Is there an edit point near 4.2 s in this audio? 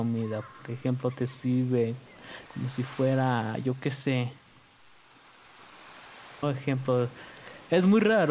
no; 2 cuts; at 2.5 s, 6.4 s

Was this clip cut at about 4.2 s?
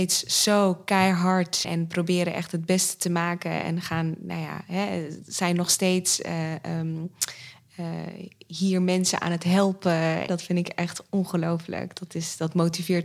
no; 2 cuts; at 1.6 s, 10.3 s

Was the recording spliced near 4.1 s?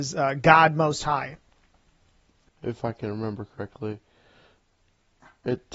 no; 1 cut; at 2.5 s

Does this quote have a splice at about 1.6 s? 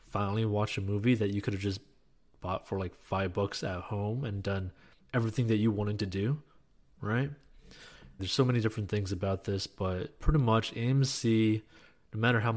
no; 1 cut; at 8.2 s

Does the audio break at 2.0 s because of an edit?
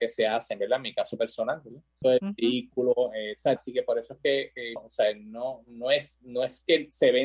yes; 3 cuts; at 2.0 s, 3.6 s, 4.8 s

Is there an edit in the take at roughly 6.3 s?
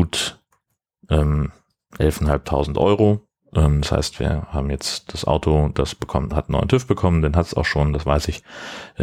no; 0 cuts

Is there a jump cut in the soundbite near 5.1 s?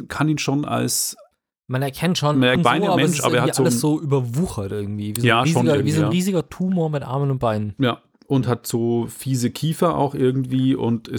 no; 1 cut; at 2.6 s

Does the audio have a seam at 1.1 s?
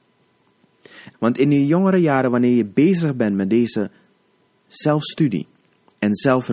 yes; 1 cut; at 1.1 s

